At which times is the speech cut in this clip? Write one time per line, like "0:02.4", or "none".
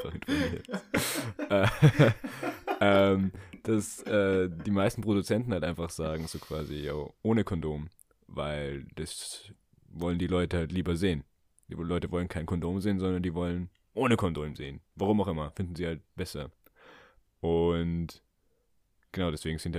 none